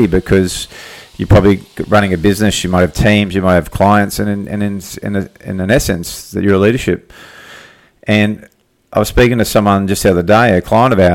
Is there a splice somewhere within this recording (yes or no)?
no